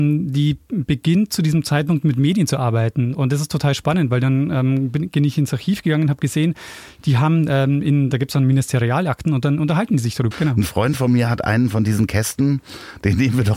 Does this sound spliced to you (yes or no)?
yes